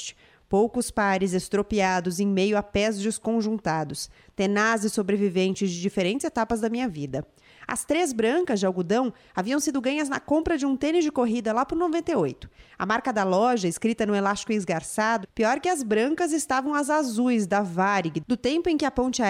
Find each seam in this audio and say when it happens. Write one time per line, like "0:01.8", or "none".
0:15.2